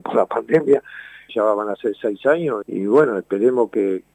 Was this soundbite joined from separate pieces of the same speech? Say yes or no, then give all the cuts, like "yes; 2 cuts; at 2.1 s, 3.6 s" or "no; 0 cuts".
yes; 2 cuts; at 1.3 s, 2.6 s